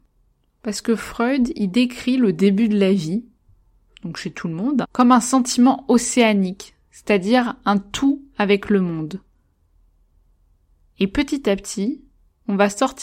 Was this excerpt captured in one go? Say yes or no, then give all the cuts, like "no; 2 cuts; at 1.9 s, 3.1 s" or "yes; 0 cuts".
no; 1 cut; at 4.8 s